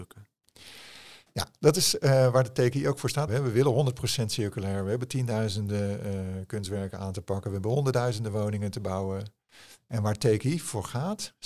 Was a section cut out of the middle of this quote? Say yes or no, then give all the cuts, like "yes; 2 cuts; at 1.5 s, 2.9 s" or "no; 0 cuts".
yes; 1 cut; at 3.3 s